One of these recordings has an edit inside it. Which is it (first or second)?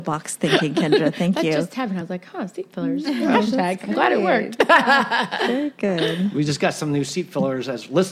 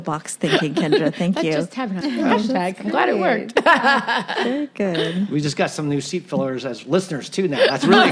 second